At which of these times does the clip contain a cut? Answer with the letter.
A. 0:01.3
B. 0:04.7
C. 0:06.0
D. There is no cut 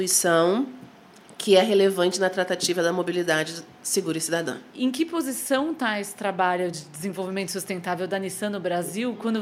B